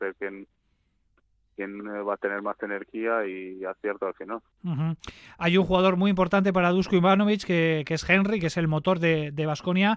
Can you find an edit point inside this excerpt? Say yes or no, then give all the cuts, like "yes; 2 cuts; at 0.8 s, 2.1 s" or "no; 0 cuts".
no; 0 cuts